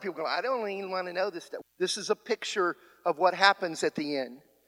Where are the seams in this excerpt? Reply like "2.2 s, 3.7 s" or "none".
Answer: 1.6 s